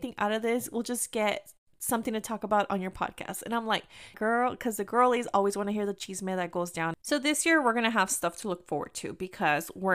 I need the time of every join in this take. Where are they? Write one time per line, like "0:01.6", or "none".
0:04.1